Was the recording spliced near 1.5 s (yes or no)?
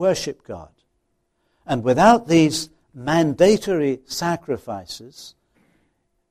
no